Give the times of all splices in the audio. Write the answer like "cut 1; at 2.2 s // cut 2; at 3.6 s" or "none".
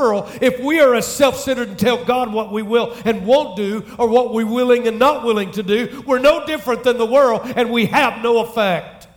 none